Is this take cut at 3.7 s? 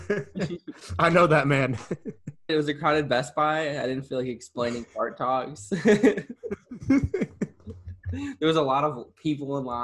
no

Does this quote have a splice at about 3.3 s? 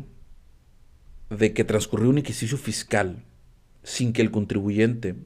no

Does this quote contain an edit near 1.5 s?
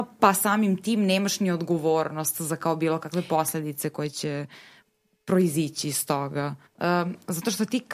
no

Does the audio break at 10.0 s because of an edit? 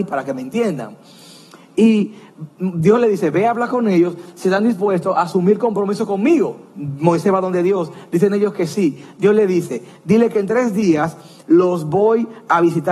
no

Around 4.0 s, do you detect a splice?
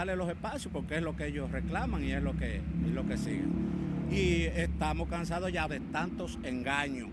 no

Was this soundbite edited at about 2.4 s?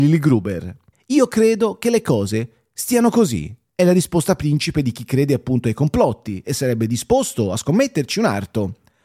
no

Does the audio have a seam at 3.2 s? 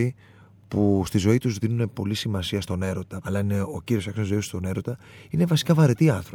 yes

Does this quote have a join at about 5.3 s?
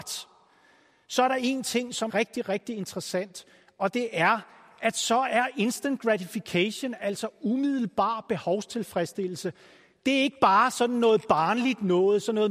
no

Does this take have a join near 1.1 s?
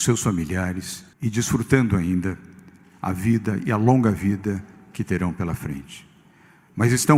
yes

